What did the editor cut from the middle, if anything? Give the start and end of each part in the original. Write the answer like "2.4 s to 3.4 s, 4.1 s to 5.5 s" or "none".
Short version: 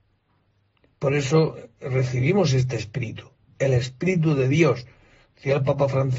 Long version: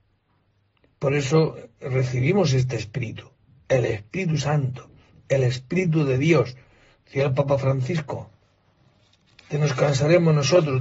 3.5 s to 5.2 s